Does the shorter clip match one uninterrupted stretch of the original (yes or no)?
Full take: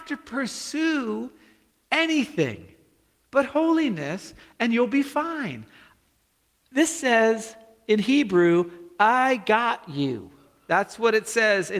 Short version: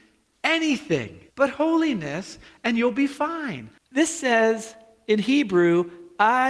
no